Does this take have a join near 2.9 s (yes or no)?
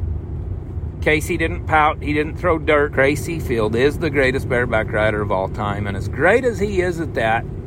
yes